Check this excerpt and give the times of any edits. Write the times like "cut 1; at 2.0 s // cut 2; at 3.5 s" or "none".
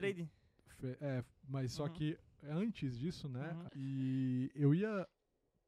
cut 1; at 3.7 s